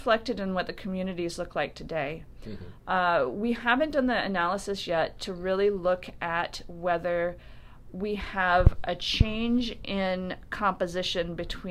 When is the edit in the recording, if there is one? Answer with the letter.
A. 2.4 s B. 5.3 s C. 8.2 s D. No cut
D